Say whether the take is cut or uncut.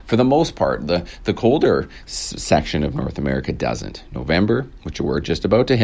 uncut